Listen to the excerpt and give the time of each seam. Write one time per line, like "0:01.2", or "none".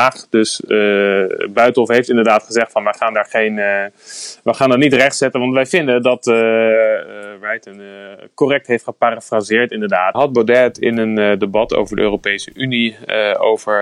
0:10.1